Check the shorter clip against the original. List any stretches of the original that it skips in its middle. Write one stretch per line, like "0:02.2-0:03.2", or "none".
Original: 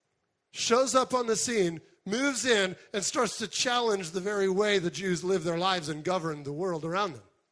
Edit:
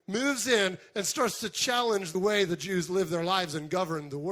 0:04.1-0:04.5

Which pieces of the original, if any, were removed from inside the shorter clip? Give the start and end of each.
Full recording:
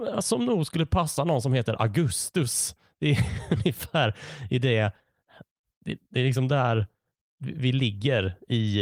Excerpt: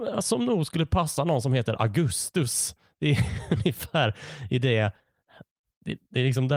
none

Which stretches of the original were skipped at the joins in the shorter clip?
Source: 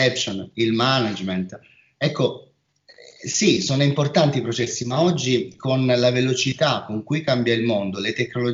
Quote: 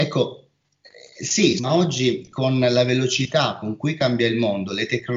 0:03.6-0:04.8

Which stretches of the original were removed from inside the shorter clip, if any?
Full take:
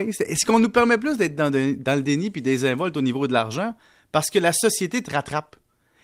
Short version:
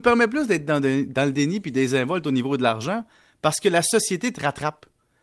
none

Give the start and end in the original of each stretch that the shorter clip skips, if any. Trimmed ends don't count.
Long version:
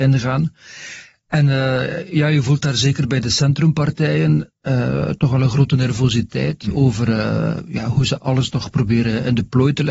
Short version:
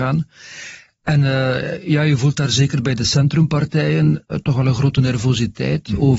0:04.6-0:05.1

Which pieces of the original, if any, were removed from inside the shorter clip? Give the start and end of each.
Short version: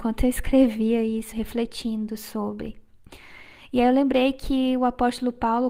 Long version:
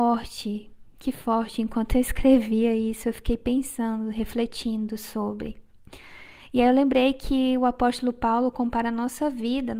0:03.0-0:04.1

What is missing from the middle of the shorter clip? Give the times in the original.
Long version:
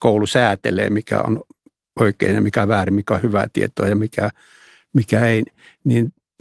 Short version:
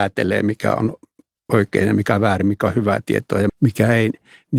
0:04.0-0:04.8

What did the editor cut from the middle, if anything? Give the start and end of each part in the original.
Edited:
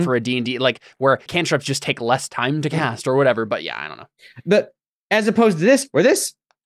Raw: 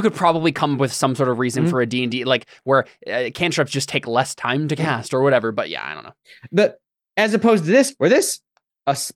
0:02.9-0:03.3

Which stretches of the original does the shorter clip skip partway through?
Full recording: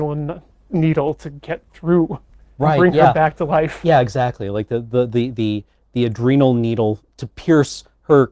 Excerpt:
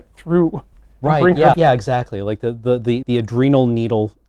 0:03.1-0:03.8
0:05.3-0:05.9

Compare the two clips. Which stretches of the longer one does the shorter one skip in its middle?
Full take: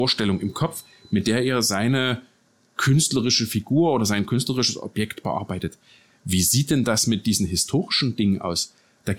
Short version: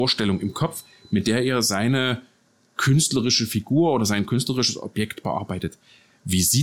none

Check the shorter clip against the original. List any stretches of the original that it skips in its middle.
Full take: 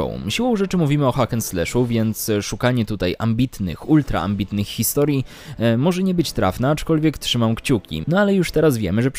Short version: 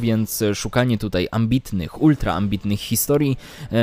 none

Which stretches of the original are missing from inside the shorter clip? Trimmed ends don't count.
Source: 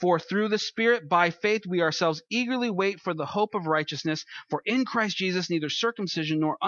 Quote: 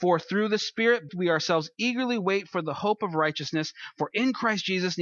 0:01.1-0:01.6

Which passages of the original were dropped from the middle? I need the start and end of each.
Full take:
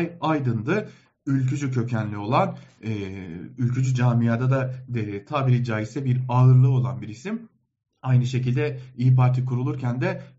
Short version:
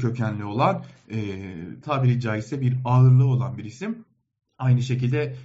0:03.5-0:05.3

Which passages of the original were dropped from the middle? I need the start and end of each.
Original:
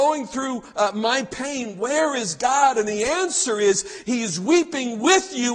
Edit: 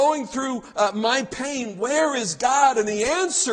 none

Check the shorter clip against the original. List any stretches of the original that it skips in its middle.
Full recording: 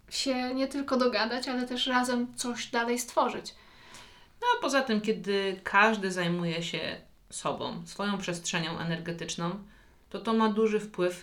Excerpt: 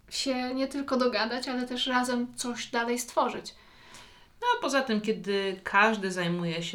none

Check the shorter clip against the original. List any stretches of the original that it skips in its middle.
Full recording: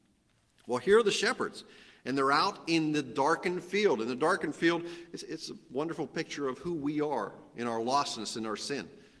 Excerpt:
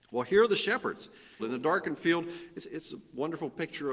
0:01.9-0:04.0

